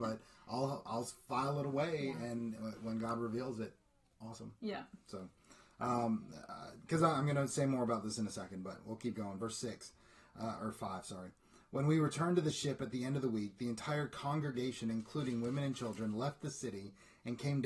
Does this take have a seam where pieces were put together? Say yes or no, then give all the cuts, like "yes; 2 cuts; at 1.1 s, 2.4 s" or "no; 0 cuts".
no; 0 cuts